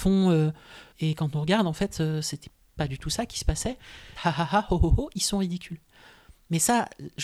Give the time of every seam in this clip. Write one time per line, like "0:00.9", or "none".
0:00.9
0:04.2